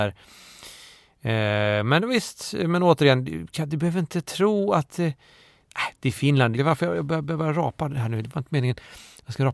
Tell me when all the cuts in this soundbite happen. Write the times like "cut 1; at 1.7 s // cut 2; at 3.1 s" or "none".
cut 1; at 6.6 s

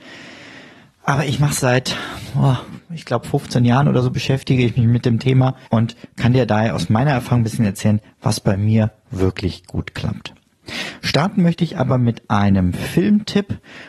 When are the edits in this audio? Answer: cut 1; at 1.6 s // cut 2; at 5.6 s

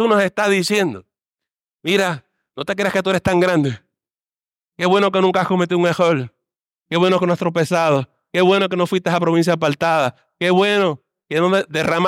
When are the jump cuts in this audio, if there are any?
none

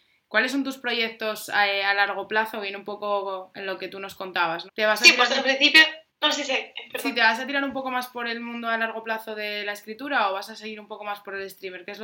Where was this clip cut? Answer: cut 1; at 4.7 s // cut 2; at 6.1 s

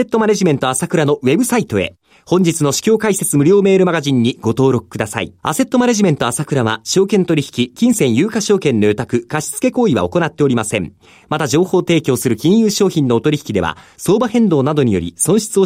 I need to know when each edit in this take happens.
cut 1; at 5.4 s

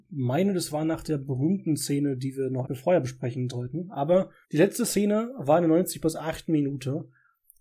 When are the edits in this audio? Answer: cut 1; at 2.6 s // cut 2; at 4.4 s

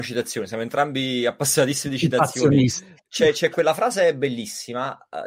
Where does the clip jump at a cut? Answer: none

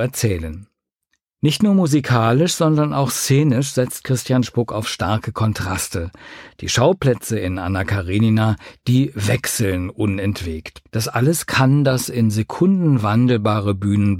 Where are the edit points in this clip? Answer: cut 1; at 10.9 s

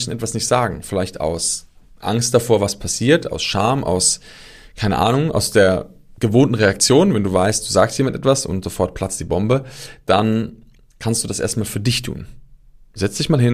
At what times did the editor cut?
none

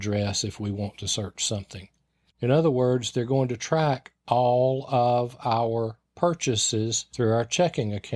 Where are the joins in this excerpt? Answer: cut 1; at 2.3 s

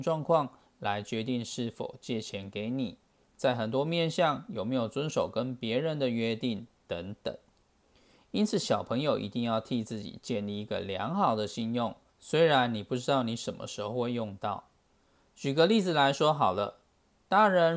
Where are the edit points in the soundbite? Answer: cut 1; at 3.2 s

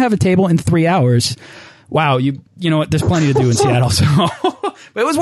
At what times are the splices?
cut 1; at 2.5 s

